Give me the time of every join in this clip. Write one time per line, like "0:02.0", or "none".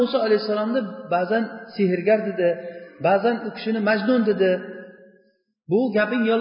none